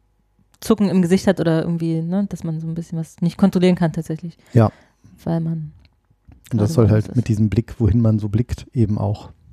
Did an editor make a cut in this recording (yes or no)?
no